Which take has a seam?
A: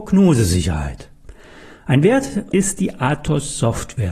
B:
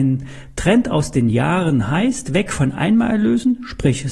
A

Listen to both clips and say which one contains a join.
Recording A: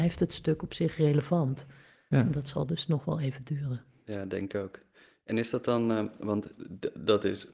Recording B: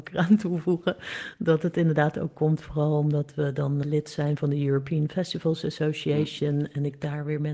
B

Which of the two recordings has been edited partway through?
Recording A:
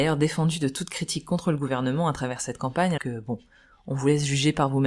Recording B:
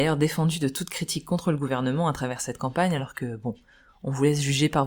A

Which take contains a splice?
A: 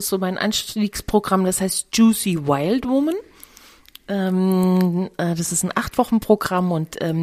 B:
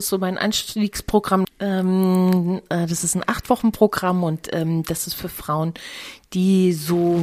B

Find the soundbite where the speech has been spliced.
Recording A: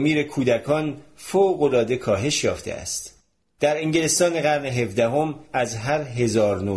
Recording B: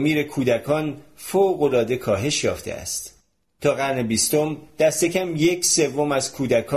A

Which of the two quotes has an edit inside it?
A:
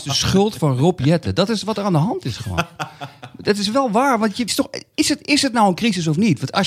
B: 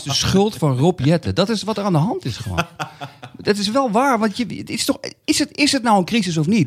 A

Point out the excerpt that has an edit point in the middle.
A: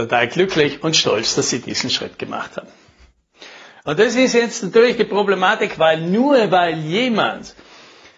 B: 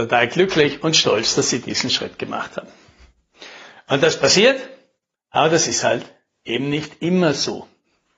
A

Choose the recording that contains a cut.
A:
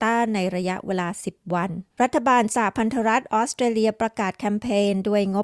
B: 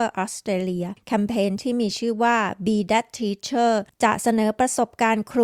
A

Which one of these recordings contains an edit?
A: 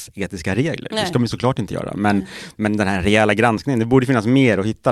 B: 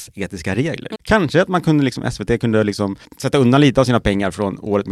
B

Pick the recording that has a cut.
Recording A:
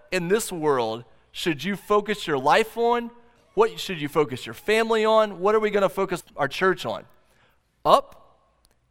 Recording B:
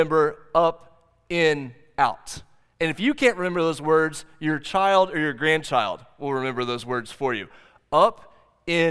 A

